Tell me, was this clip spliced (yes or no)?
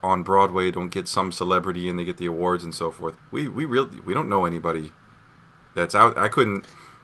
yes